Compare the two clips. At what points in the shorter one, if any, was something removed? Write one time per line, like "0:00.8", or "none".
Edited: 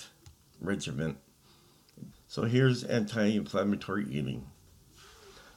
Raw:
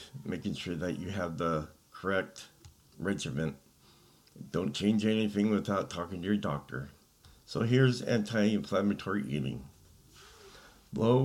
0:02.1